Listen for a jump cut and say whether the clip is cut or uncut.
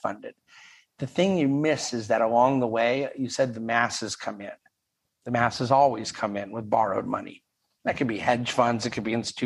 cut